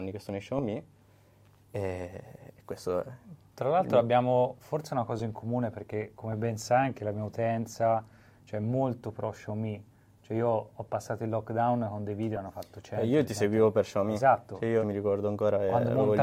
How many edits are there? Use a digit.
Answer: 1